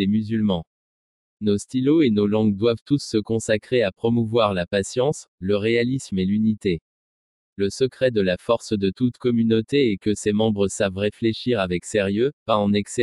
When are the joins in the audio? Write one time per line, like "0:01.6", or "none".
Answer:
none